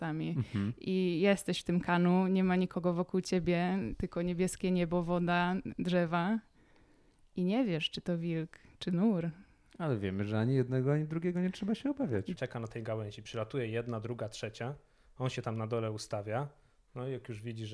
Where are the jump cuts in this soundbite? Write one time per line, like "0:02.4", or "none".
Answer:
0:12.4